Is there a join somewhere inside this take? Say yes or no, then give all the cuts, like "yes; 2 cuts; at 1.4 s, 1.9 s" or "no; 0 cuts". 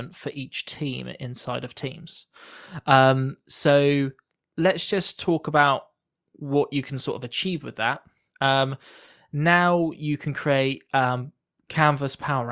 no; 0 cuts